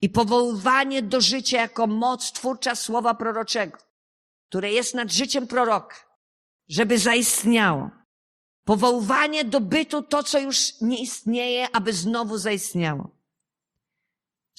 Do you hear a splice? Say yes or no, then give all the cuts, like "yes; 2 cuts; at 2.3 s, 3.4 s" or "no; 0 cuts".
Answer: no; 0 cuts